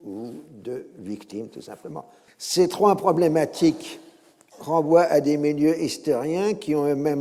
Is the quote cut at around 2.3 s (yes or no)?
yes